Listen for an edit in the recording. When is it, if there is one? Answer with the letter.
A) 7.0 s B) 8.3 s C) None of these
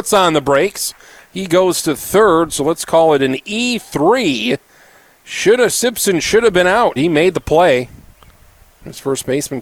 A